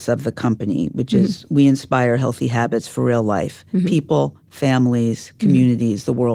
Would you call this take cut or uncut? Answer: uncut